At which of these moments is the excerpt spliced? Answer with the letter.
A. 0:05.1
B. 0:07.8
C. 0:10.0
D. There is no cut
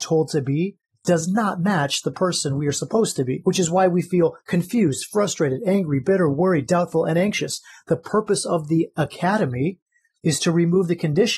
D